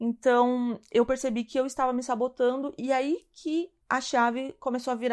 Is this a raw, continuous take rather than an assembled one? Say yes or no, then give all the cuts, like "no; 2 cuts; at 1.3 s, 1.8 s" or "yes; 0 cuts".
no; 1 cut; at 3.8 s